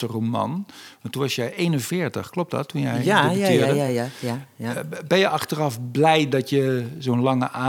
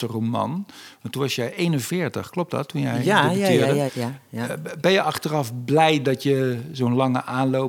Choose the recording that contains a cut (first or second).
second